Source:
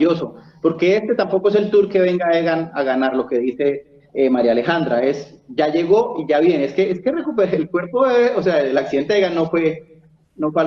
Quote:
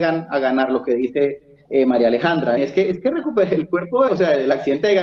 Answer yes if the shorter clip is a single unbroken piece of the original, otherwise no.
no